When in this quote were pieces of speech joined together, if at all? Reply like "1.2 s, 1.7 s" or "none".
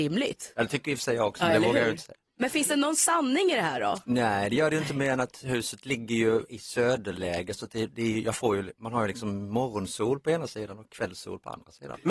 6.5 s

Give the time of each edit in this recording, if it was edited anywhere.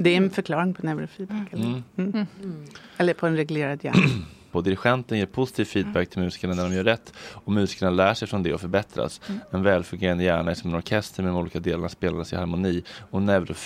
4.5 s

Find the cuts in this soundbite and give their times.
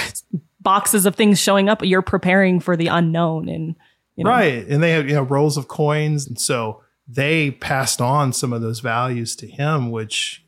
6.3 s

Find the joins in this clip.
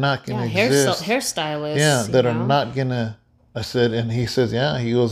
3.4 s

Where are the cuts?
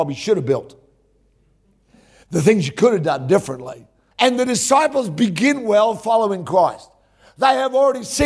4.1 s

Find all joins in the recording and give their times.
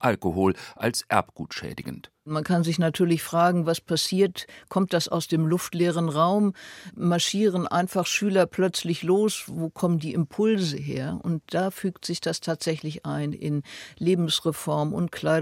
none

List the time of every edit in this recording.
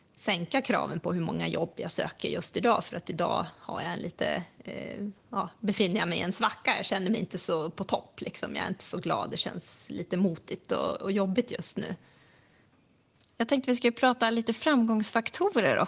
none

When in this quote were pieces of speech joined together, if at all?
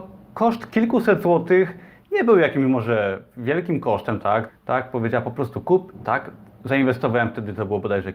4.5 s, 6.0 s

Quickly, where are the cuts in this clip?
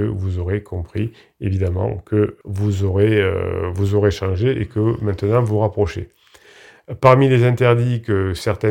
2.4 s

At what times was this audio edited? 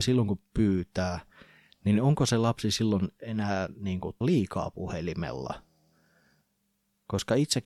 4.2 s

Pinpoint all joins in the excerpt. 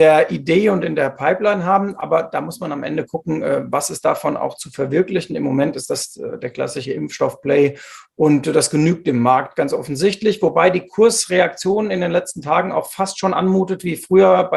none

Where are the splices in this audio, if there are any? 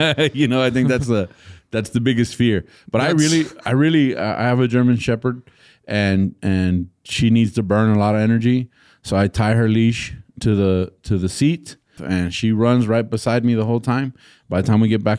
12.0 s

